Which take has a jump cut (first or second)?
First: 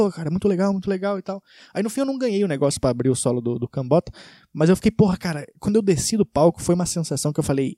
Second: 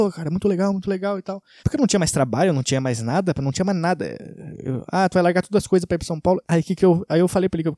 second